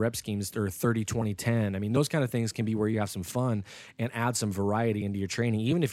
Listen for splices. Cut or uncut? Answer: uncut